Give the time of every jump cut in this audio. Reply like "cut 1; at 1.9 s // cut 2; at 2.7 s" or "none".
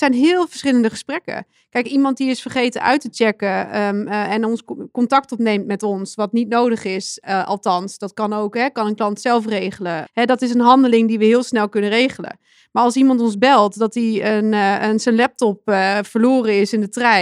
cut 1; at 10.0 s